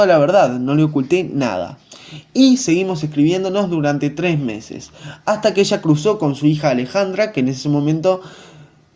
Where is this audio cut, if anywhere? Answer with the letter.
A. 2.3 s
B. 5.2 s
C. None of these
C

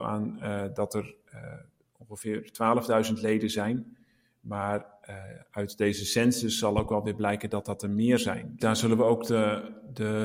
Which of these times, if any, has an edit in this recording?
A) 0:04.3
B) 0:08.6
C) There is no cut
B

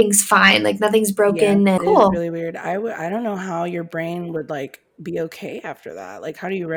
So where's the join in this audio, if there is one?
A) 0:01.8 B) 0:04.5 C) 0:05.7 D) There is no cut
A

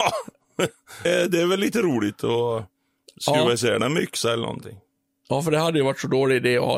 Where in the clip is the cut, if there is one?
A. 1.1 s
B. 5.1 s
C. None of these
A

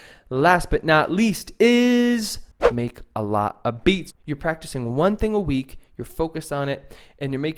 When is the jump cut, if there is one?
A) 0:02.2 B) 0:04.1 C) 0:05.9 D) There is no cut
B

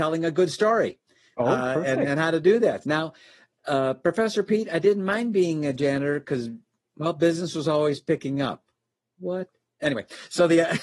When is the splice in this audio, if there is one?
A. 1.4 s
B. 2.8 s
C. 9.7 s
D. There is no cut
B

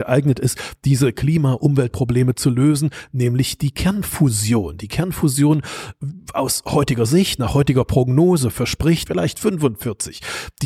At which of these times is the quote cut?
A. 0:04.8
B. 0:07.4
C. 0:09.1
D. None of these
C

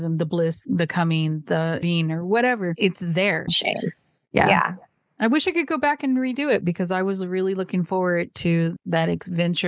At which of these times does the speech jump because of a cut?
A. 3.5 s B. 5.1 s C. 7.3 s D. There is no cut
A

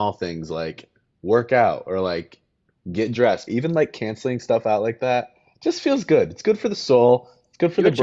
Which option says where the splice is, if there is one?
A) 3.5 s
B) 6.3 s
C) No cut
A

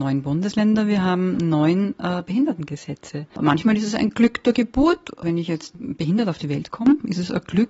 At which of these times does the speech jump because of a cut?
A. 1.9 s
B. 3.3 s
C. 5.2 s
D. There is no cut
D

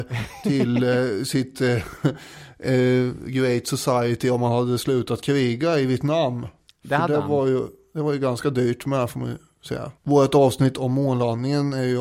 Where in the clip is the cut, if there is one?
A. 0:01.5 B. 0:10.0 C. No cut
B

